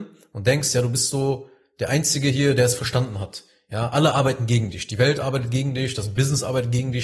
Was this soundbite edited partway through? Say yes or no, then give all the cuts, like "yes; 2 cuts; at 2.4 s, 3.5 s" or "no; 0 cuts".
no; 0 cuts